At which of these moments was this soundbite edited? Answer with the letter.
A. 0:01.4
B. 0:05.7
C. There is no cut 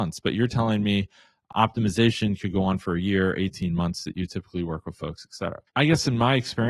B